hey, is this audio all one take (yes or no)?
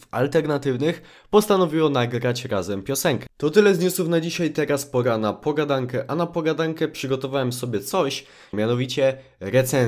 no